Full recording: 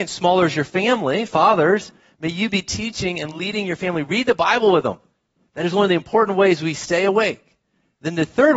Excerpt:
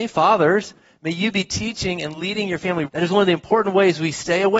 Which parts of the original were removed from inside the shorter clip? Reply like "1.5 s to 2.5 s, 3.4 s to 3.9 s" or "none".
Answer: 4.0 s to 5.5 s